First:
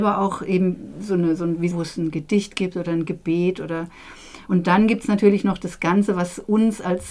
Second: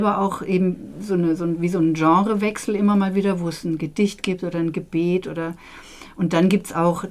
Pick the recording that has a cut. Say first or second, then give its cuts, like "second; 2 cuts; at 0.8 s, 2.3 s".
first; 2 cuts; at 1.7 s, 4.5 s